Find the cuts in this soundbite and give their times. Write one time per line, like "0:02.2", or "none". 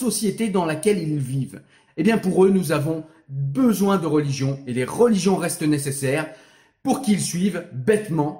0:01.9